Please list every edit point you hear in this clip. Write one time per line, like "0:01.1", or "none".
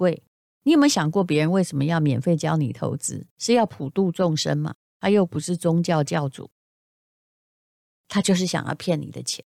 none